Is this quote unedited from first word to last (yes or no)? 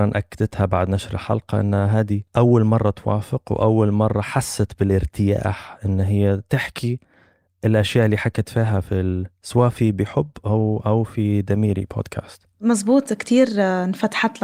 no